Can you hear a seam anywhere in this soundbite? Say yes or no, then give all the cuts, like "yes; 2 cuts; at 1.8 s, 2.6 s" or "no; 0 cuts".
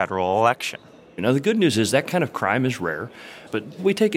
no; 0 cuts